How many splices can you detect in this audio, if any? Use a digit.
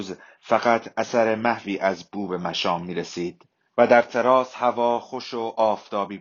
1